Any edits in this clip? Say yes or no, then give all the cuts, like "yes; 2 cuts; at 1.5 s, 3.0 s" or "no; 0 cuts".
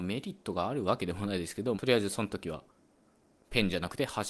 yes; 1 cut; at 1.7 s